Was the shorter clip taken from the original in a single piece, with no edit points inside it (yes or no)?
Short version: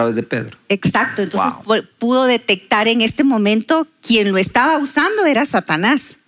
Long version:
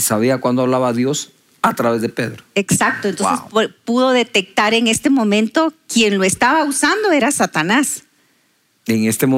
yes